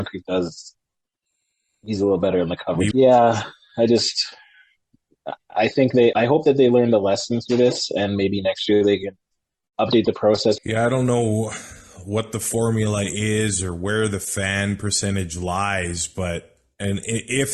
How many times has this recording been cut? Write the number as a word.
three